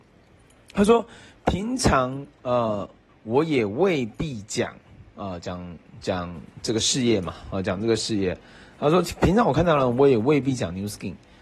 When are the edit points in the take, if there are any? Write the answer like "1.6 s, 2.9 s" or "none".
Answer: 3.1 s